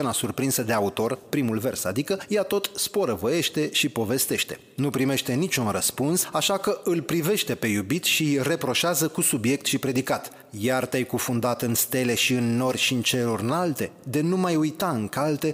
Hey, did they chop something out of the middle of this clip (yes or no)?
no